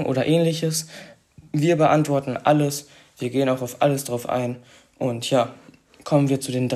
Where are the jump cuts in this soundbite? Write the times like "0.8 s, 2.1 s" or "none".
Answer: none